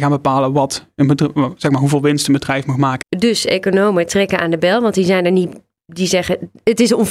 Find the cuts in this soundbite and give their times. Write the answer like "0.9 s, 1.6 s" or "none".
3.0 s

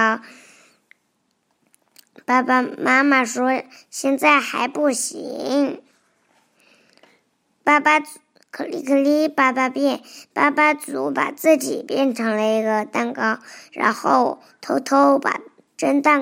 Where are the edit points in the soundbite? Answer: none

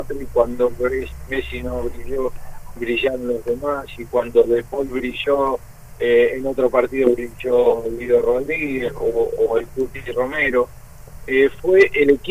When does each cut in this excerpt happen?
none

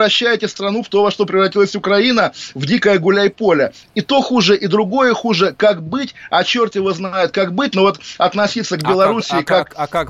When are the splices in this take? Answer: none

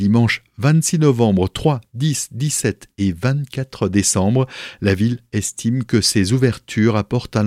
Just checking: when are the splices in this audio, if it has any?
none

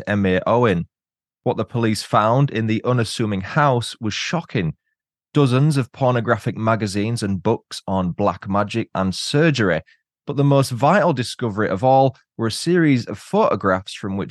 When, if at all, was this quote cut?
8.9 s

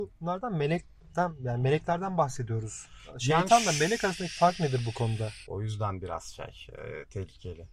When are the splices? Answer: 5.4 s

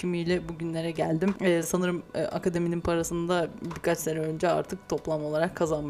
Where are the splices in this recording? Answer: none

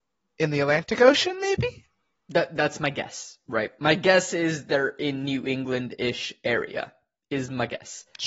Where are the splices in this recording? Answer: none

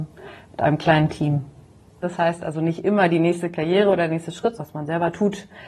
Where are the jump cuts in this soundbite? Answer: 2.0 s, 4.6 s

